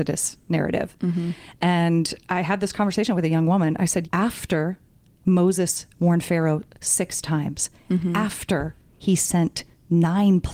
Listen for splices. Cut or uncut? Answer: cut